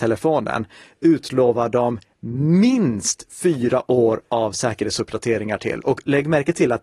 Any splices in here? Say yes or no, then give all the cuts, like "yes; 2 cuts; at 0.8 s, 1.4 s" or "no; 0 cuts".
no; 0 cuts